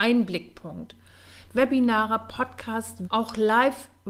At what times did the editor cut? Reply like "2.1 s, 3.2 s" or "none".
1.5 s, 3.0 s